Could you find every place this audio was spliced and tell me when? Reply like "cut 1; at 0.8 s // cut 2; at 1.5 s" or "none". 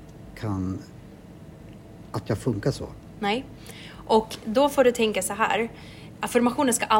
none